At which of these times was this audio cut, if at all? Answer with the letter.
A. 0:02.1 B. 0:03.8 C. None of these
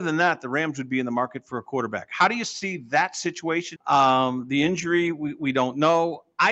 B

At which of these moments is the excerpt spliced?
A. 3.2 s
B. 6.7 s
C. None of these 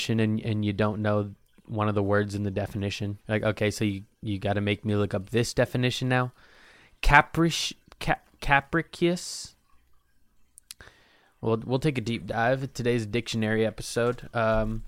A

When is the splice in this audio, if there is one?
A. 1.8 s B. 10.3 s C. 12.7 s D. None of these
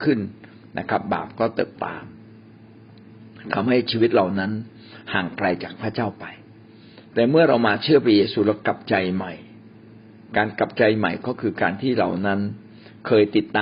A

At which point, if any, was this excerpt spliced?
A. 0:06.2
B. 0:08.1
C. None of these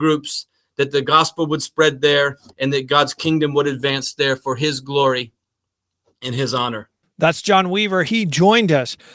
B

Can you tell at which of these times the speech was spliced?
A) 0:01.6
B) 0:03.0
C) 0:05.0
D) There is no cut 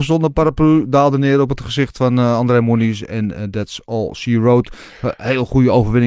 D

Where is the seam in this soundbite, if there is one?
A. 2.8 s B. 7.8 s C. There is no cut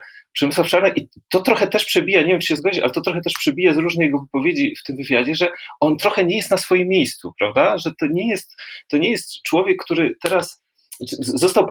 C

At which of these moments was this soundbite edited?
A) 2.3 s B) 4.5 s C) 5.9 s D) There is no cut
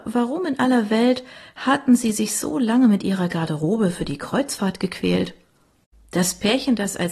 C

